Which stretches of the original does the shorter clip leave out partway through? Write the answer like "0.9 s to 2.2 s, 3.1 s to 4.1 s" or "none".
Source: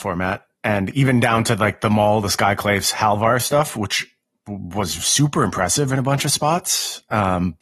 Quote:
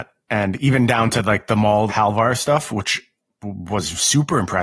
2.2 s to 2.9 s